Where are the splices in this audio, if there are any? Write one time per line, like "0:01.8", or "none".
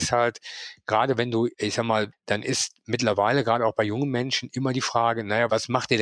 0:02.1